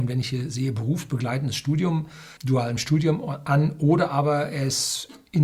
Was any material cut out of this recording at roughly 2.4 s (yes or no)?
yes